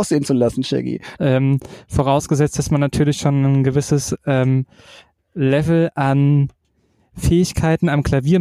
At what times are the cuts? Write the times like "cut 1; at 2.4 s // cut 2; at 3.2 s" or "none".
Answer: cut 1; at 1.2 s